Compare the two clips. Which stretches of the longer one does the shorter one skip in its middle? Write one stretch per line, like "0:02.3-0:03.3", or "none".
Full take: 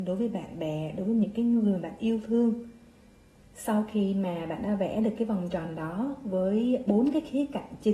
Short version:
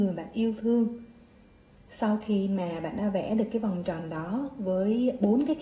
none